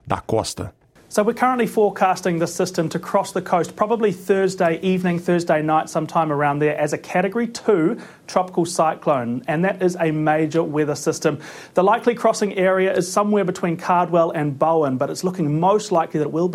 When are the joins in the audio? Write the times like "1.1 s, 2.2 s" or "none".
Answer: none